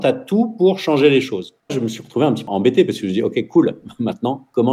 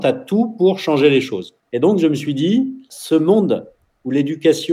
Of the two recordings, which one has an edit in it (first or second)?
first